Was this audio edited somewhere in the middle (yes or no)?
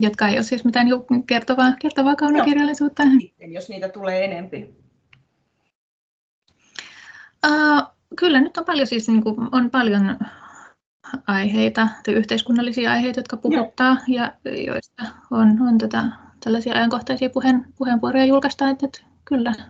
yes